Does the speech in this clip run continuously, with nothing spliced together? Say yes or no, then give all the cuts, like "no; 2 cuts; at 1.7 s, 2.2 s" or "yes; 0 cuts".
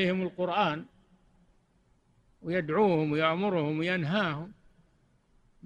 yes; 0 cuts